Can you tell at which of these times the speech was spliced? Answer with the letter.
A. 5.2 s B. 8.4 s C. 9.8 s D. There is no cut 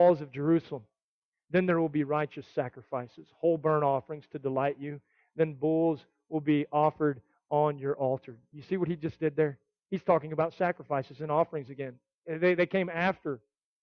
D